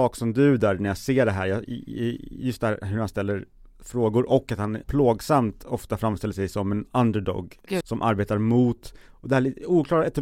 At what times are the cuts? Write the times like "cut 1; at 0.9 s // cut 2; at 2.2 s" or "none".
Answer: cut 1; at 4.8 s // cut 2; at 7.8 s